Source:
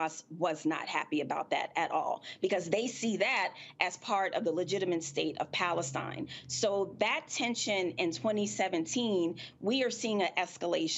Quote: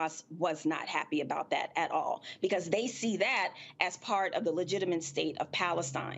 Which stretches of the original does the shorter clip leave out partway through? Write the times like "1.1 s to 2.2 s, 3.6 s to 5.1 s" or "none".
none